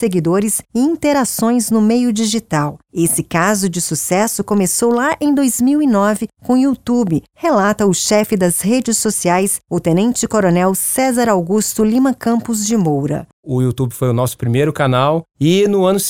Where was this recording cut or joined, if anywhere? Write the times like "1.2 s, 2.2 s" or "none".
13.3 s